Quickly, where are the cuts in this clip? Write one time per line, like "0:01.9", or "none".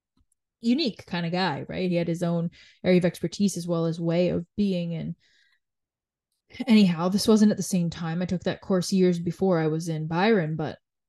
none